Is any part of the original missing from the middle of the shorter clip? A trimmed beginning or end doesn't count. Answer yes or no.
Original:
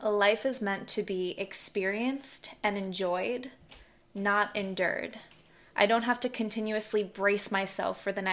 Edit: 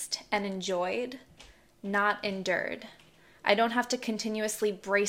no